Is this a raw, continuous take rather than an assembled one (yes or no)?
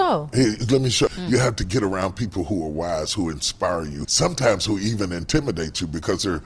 no